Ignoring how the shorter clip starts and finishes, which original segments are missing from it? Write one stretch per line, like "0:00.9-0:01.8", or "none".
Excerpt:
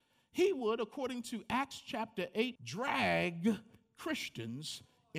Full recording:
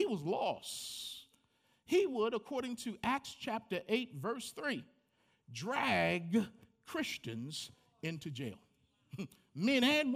0:04.1-0:05.4